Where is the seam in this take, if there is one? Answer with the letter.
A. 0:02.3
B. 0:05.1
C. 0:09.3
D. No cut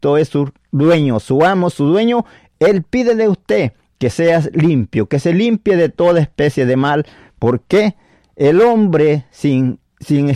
D